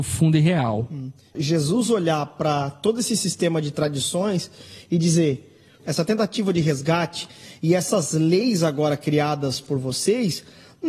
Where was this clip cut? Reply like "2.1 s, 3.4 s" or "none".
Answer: 1.4 s, 5.8 s